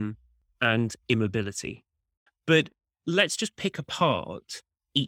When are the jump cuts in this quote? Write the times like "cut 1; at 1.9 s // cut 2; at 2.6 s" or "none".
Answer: cut 1; at 2.3 s